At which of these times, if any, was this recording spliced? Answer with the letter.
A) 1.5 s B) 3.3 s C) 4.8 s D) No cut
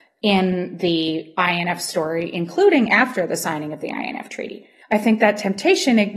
C